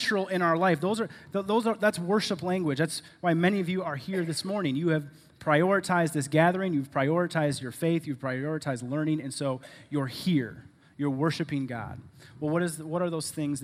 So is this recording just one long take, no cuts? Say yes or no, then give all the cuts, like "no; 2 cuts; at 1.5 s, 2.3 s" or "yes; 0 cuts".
yes; 0 cuts